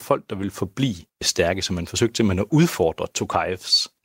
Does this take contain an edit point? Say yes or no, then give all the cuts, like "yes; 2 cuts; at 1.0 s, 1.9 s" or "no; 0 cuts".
yes; 1 cut; at 1.1 s